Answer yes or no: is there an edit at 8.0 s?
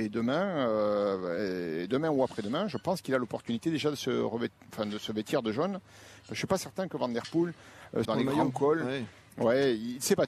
yes